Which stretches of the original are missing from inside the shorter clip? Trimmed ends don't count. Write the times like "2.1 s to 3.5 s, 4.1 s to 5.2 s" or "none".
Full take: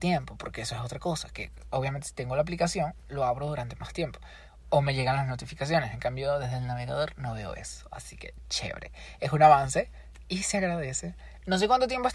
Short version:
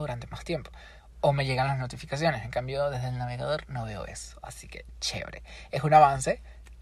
none